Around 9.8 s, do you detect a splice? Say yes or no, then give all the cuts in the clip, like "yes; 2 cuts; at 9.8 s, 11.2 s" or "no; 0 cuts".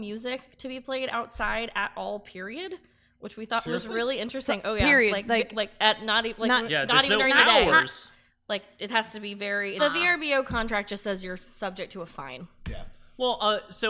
yes; 1 cut; at 9.8 s